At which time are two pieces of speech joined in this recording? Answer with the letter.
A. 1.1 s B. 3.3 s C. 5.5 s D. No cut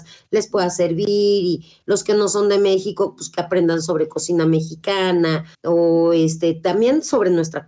C